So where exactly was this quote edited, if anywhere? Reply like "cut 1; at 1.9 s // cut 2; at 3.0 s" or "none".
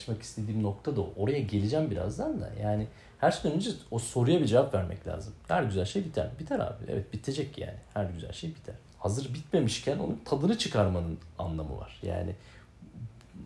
cut 1; at 8.9 s // cut 2; at 12.0 s